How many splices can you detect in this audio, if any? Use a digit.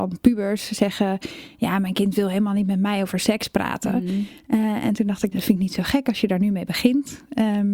1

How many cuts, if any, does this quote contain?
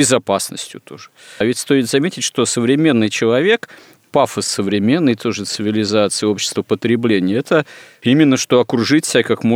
2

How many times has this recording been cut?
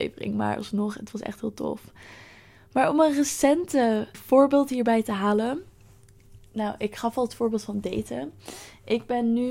2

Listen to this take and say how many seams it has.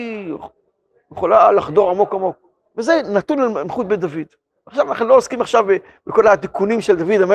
1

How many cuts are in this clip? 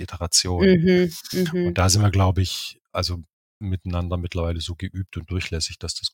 0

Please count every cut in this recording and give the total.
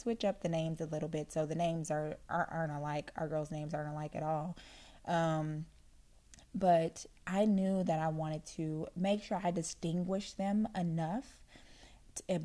0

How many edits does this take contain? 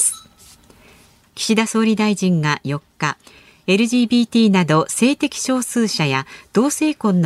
0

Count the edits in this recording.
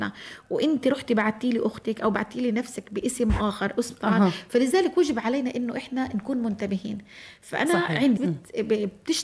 1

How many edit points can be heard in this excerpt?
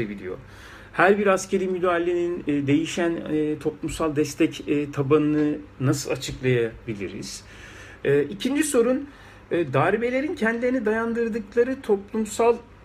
1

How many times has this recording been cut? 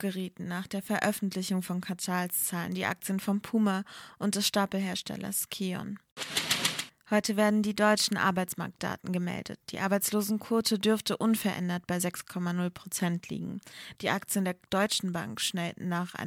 1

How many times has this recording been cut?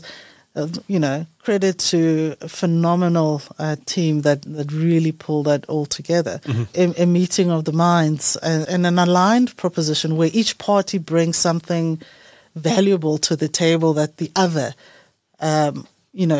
2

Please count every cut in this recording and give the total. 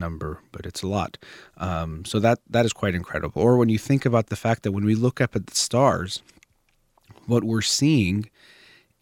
0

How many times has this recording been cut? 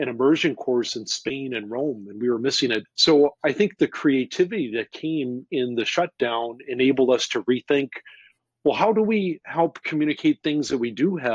1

